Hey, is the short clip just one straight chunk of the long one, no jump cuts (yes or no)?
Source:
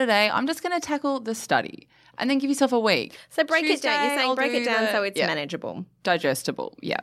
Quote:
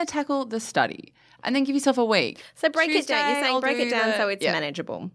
yes